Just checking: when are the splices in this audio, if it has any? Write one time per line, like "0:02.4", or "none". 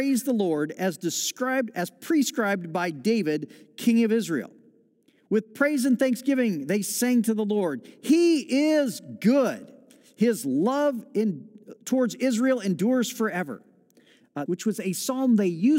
0:14.5